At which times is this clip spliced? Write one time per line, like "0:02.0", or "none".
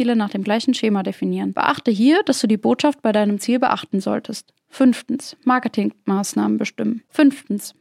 none